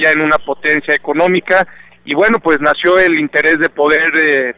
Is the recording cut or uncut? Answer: uncut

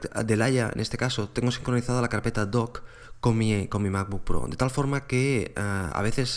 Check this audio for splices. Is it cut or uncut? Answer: uncut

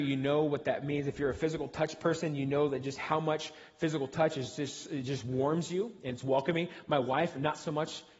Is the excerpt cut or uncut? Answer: uncut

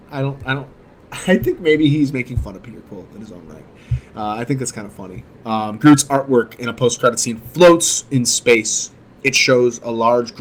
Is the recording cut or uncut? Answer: cut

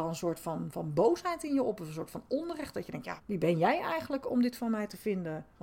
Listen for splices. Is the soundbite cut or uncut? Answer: cut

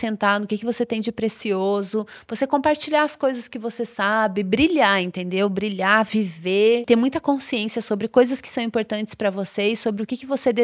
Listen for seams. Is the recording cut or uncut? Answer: uncut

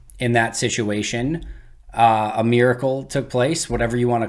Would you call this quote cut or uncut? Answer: uncut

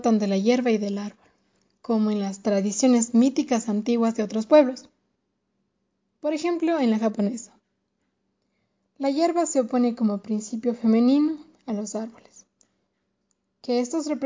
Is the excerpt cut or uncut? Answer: uncut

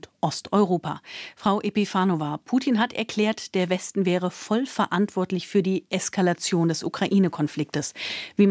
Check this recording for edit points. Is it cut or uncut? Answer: uncut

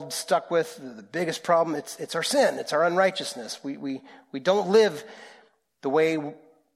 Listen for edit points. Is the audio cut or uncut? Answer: uncut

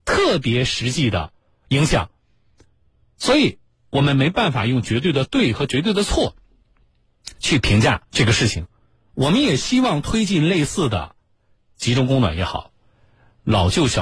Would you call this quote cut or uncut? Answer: cut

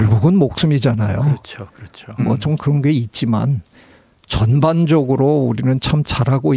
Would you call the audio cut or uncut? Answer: cut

